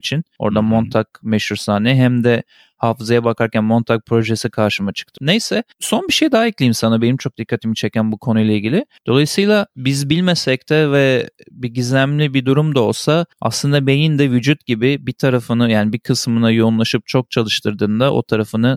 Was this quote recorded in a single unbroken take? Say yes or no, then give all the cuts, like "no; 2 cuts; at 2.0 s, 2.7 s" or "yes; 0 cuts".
no; 3 cuts; at 5.2 s, 9.0 s, 13.3 s